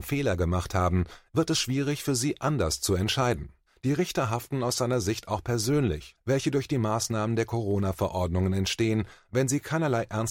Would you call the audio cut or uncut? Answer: cut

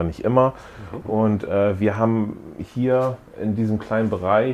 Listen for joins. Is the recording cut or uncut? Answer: cut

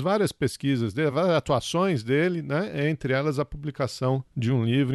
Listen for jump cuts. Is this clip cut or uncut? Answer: uncut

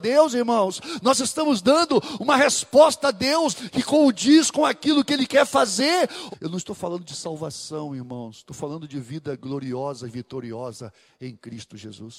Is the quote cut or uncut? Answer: cut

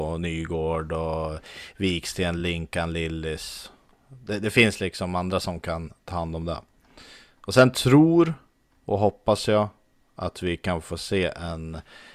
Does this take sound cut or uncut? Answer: uncut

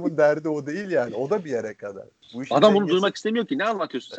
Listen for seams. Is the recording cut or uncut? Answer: uncut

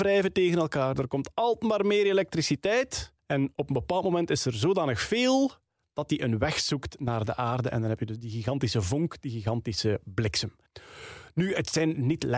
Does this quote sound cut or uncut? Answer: uncut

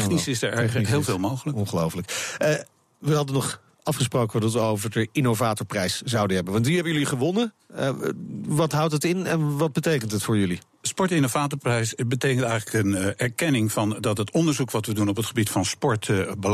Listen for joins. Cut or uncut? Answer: uncut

